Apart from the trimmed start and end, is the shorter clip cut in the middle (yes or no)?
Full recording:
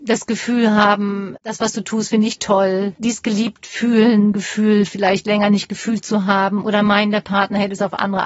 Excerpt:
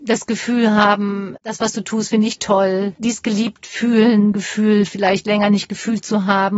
no